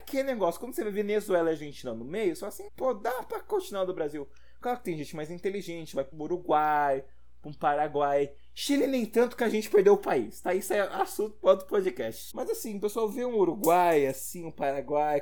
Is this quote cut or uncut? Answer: cut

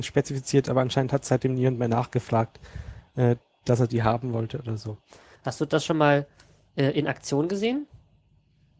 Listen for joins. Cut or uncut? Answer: cut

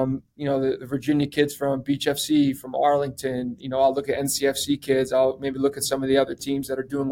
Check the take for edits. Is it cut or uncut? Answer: uncut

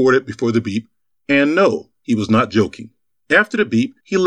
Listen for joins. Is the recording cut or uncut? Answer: uncut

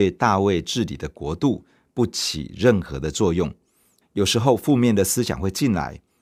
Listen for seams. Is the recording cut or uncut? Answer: cut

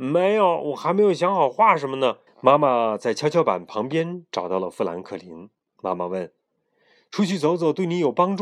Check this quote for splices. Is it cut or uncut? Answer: cut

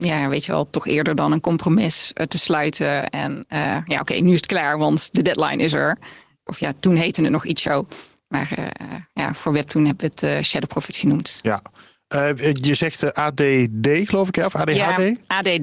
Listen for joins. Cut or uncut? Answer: cut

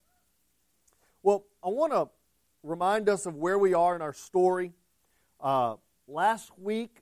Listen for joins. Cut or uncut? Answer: uncut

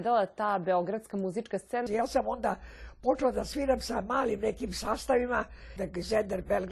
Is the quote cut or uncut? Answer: cut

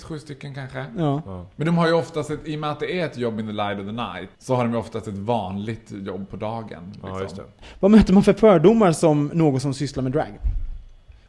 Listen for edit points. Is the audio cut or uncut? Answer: cut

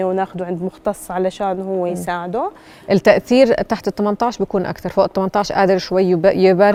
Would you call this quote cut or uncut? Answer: uncut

